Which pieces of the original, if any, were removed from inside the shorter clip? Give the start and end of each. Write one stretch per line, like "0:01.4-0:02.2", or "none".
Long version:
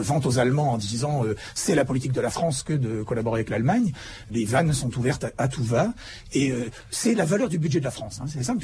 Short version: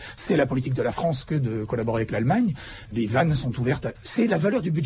0:05.3-0:06.8